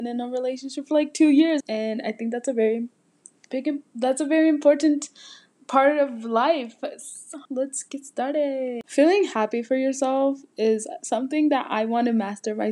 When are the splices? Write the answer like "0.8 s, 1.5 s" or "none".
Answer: 1.6 s, 7.5 s, 8.8 s